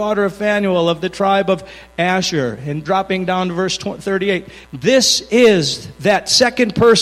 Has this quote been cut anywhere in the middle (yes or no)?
yes